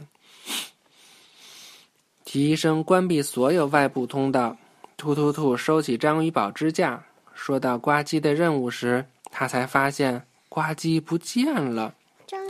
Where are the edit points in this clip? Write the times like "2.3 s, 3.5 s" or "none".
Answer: none